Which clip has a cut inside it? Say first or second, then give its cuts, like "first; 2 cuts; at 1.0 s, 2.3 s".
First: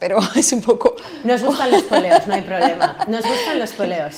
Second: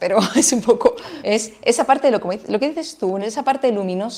second; 1 cut; at 1.2 s